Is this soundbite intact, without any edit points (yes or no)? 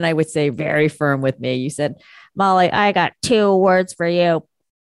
yes